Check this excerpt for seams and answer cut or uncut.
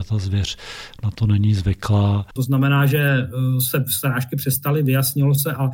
cut